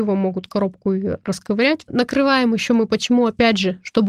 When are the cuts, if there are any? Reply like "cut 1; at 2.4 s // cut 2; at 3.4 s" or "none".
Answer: cut 1; at 1.9 s